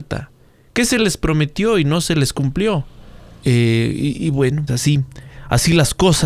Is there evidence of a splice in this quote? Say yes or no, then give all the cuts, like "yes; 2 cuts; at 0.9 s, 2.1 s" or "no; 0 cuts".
yes; 2 cuts; at 3.4 s, 4.7 s